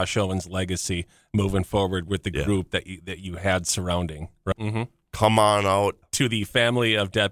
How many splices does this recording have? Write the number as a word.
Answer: two